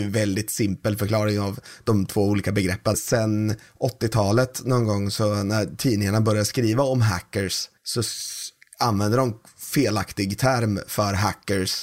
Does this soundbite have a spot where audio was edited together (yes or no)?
yes